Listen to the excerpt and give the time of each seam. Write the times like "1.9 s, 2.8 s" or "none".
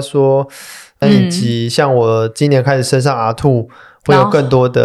1.0 s